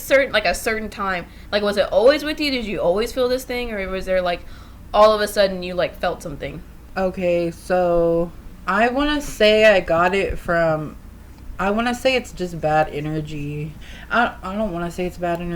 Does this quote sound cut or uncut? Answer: uncut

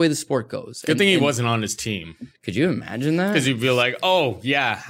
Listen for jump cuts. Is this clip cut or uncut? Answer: uncut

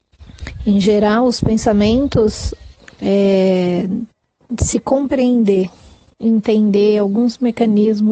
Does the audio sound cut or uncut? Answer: cut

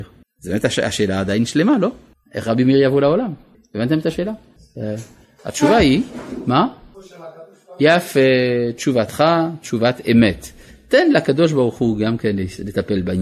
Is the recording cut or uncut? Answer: uncut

